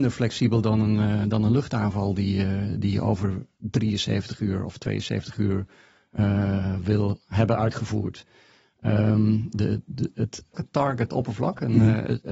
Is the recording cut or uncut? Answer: cut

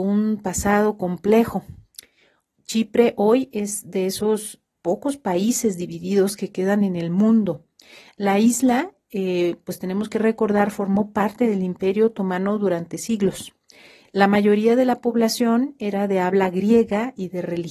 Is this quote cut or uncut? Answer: uncut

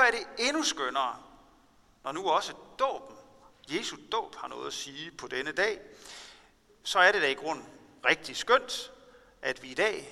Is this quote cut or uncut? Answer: uncut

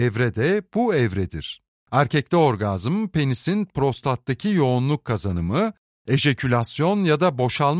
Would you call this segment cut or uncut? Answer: uncut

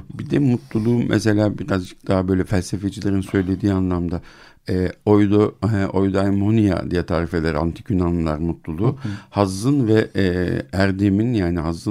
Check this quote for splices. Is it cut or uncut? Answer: uncut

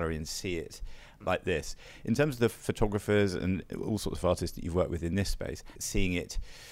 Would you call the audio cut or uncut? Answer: cut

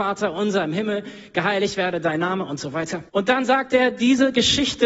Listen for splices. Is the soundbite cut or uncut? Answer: cut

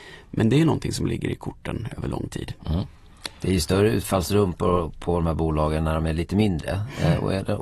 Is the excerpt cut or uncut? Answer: uncut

